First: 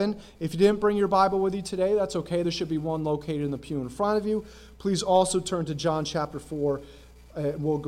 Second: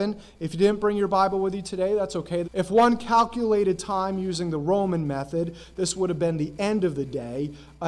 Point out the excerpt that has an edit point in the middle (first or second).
second